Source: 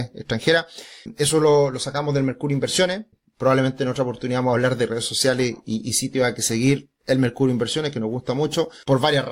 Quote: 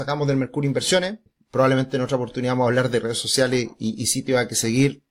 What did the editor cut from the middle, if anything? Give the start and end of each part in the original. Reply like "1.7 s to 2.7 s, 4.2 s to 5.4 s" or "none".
none

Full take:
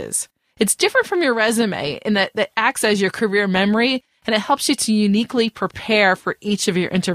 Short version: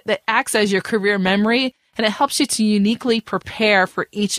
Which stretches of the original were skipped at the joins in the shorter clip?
none

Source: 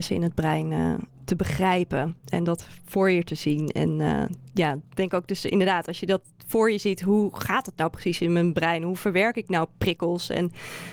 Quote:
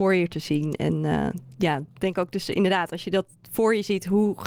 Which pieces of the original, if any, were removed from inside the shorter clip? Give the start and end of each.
none

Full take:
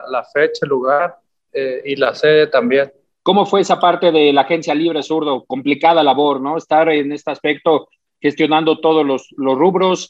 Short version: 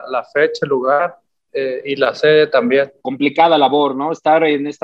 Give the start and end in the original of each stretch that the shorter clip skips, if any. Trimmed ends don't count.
3.0 s to 5.5 s

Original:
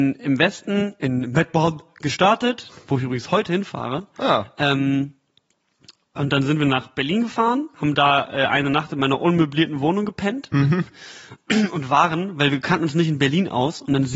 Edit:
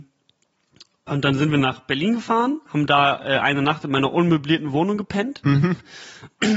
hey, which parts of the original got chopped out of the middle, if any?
none

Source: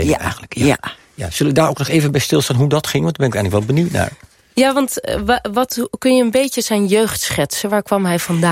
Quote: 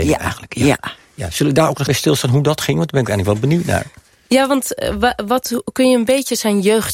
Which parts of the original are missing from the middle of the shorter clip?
1.9 s to 2.1 s

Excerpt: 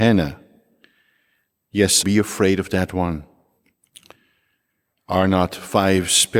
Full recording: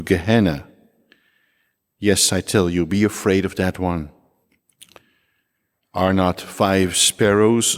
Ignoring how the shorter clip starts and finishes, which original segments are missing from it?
2.3 s to 2.9 s

